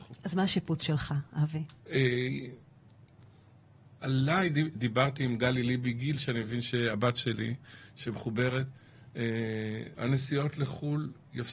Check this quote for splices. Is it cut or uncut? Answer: cut